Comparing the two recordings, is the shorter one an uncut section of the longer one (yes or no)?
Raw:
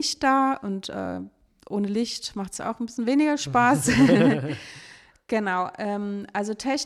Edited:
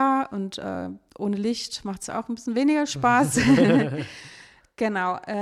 no